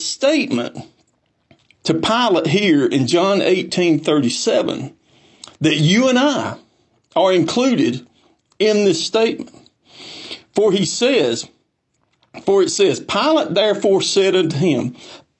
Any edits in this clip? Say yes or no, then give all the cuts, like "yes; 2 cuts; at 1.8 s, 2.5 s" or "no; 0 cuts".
no; 0 cuts